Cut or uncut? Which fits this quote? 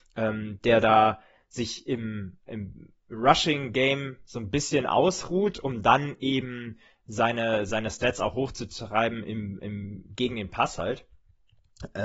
uncut